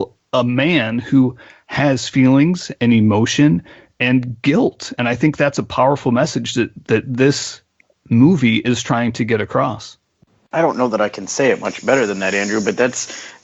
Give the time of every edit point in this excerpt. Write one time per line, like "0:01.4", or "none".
none